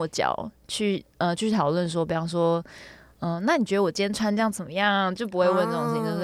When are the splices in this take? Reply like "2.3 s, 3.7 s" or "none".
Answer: none